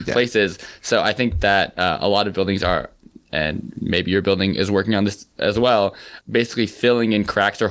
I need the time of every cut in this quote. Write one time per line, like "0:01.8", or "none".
none